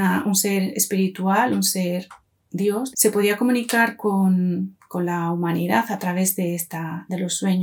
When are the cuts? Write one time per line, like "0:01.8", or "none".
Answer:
0:02.9